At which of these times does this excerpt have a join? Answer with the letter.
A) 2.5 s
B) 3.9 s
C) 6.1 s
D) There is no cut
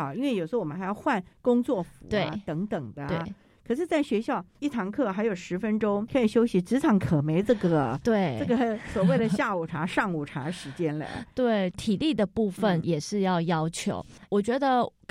C